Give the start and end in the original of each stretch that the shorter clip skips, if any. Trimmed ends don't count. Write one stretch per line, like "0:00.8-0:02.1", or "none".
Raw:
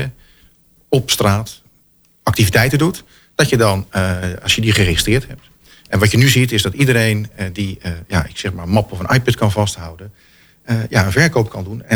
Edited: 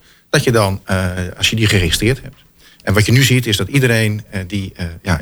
none